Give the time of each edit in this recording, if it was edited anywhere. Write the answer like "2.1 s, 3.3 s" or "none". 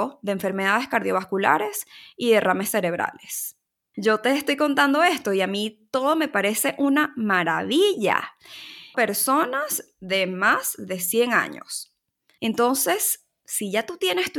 3.9 s, 8.9 s, 12.4 s